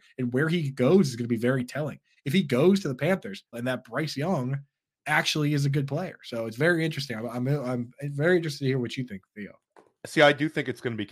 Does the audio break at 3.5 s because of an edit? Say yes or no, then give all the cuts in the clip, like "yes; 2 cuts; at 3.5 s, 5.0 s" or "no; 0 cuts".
yes; 1 cut; at 3.5 s